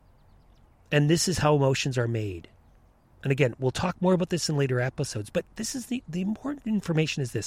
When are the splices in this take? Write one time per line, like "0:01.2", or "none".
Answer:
none